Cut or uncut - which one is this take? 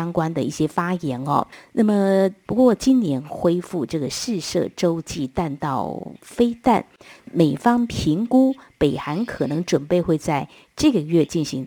cut